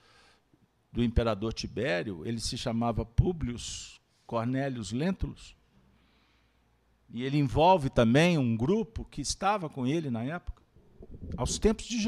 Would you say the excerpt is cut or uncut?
uncut